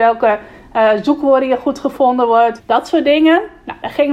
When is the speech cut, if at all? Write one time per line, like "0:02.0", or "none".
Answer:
0:02.6